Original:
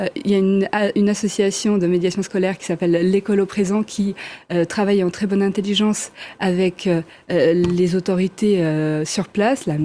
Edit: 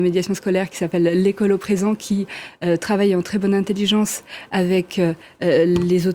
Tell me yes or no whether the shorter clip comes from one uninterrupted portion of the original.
yes